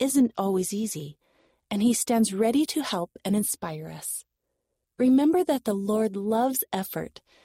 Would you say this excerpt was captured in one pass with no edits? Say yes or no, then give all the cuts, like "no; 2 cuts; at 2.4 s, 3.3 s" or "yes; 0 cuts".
no; 1 cut; at 4.8 s